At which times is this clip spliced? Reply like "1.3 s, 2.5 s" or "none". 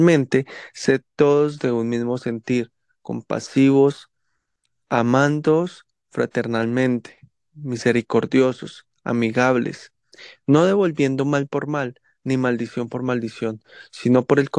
none